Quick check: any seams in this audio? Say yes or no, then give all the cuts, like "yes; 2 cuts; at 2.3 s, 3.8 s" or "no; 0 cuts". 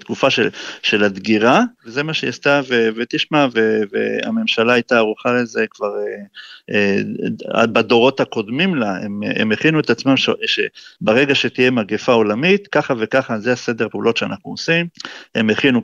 no; 0 cuts